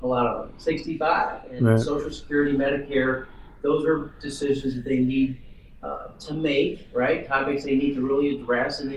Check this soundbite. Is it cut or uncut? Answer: uncut